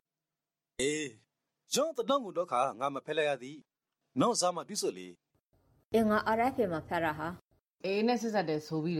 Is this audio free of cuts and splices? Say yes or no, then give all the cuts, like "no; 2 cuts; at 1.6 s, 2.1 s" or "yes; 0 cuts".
yes; 0 cuts